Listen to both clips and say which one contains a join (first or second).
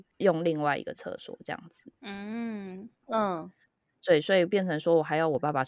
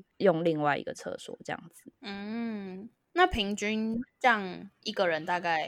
first